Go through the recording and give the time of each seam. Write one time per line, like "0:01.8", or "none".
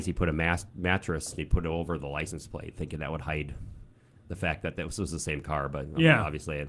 0:01.4